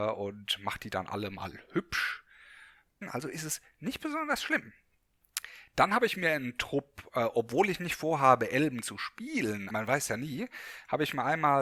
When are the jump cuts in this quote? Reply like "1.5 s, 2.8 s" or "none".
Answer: 3.0 s, 9.7 s